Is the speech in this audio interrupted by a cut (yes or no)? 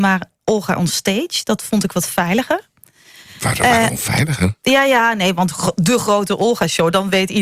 no